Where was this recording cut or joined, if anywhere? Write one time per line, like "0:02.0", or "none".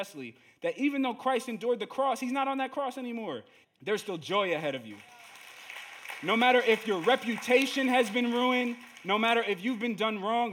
0:03.6